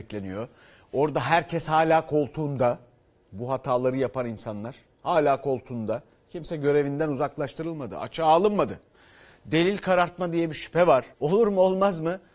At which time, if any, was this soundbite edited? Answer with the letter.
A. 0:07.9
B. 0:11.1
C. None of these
B